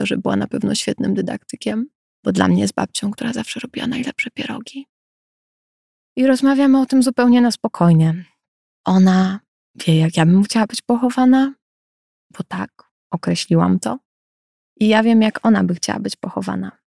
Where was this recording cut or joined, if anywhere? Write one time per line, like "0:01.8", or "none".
none

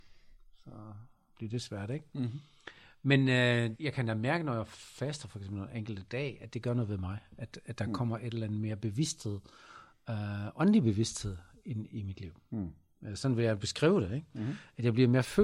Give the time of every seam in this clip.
0:03.7

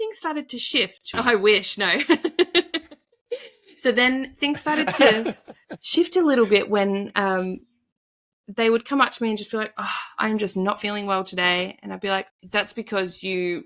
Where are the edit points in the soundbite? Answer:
0:01.1
0:12.3

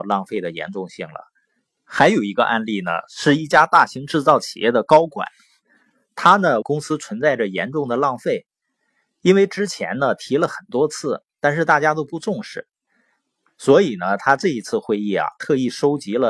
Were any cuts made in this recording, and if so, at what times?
0:01.8
0:06.6

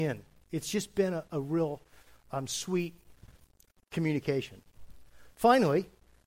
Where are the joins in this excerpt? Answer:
none

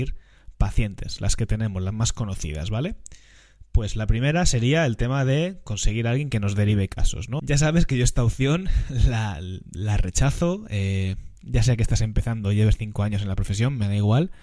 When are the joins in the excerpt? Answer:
0:07.4

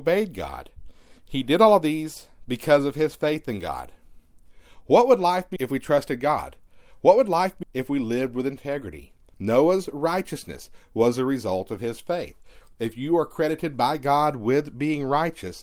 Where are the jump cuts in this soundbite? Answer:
0:05.6
0:07.6
0:09.3

